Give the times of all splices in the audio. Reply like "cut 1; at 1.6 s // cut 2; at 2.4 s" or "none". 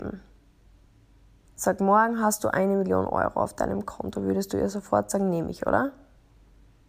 none